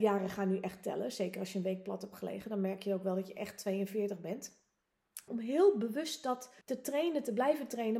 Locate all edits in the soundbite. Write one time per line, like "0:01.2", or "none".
0:05.3
0:06.6